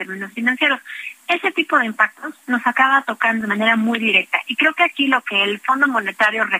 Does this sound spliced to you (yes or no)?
yes